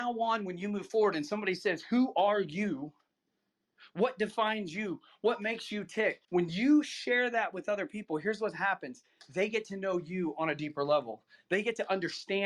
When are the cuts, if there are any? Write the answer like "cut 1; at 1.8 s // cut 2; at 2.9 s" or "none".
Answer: cut 1; at 6.2 s